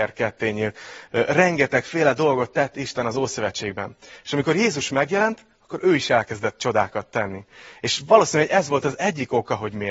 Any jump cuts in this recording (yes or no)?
no